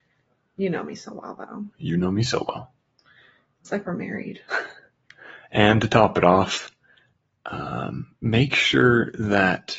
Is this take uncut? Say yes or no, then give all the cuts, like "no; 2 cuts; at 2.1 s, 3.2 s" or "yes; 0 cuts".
yes; 0 cuts